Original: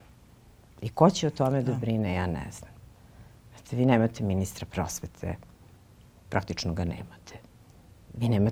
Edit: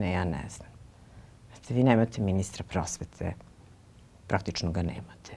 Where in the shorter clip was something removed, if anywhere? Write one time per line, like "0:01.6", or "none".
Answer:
none